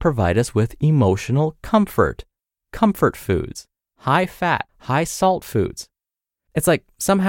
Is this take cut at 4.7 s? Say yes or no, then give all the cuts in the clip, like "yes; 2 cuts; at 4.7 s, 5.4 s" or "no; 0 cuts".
yes; 1 cut; at 4.7 s